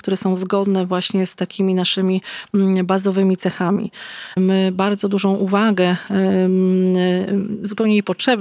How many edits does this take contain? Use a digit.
1